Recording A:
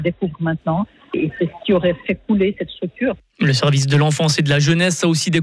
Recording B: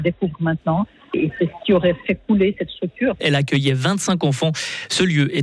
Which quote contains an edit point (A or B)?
B